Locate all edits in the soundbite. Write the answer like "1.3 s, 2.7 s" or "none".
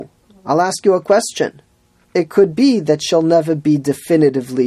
2.0 s

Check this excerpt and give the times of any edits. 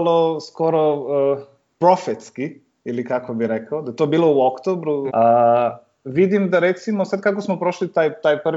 5.1 s

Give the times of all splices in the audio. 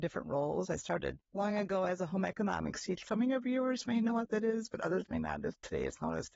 1.2 s, 3.0 s

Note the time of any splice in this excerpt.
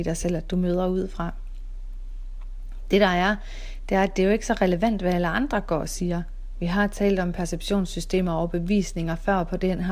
none

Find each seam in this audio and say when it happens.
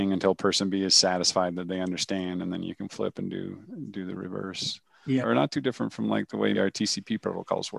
5.2 s, 6.5 s

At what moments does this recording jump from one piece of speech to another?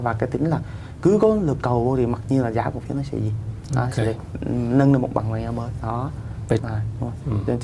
6.6 s

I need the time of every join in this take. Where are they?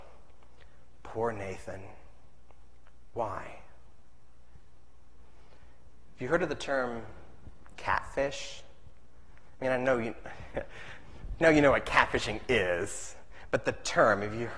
none

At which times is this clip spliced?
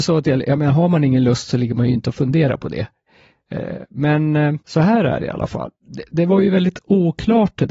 4.6 s

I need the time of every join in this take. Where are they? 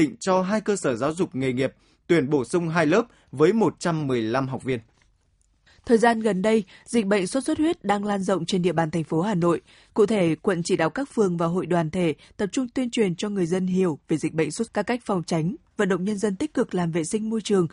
9.9 s, 14.7 s

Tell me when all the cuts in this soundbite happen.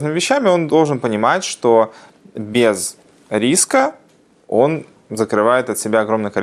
none

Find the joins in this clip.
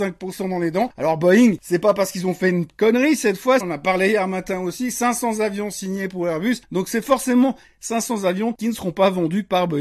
3.6 s

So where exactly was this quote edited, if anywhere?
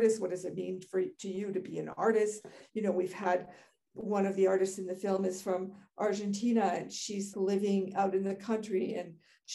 7.3 s

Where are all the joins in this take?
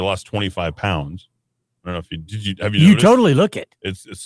none

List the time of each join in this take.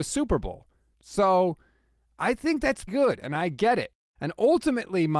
0.9 s, 2.9 s, 4.2 s

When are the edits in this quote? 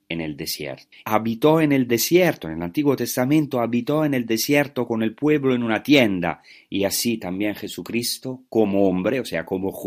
1.0 s

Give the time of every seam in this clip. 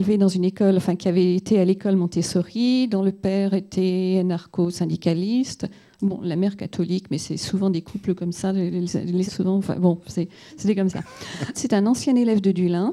9.3 s, 11.5 s

